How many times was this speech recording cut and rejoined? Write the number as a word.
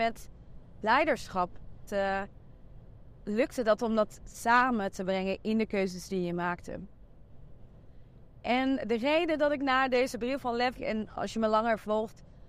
two